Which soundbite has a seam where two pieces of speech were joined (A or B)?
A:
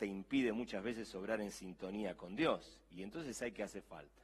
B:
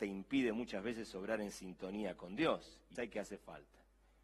B